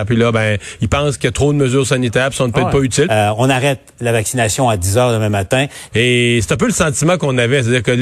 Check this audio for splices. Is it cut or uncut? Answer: cut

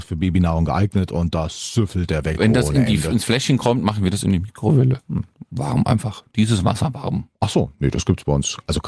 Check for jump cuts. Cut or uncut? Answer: uncut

